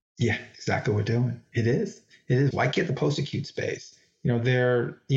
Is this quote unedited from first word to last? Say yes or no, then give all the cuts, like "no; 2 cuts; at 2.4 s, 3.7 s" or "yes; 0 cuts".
no; 1 cut; at 2.5 s